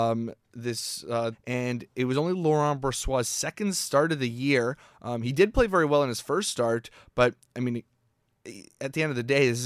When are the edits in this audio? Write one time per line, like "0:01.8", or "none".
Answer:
0:01.3